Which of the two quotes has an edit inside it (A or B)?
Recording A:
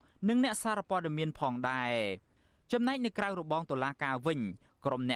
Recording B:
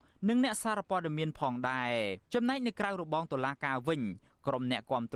B